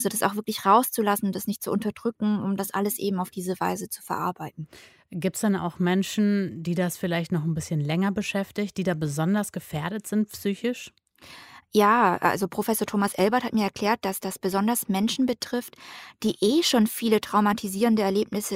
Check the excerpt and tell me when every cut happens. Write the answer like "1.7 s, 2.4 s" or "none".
none